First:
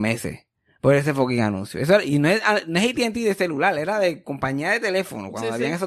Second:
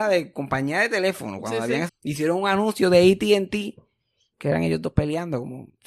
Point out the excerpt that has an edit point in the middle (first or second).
second